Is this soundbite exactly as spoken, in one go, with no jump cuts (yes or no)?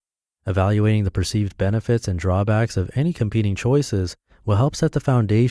yes